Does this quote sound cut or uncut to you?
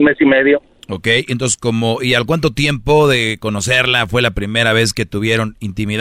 uncut